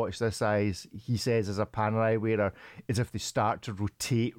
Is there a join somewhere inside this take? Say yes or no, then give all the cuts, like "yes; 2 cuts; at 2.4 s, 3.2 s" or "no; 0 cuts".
no; 0 cuts